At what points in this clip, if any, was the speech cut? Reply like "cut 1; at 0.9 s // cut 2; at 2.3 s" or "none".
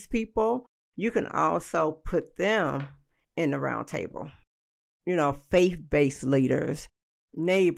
none